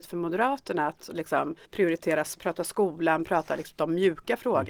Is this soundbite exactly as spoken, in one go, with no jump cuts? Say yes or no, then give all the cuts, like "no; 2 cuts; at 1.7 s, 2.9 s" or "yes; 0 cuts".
no; 2 cuts; at 1.7 s, 3.2 s